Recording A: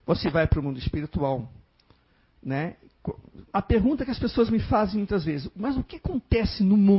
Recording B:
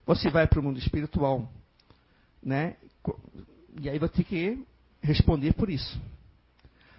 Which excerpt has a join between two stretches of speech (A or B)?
A